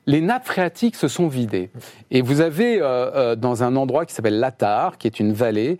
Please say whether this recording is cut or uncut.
uncut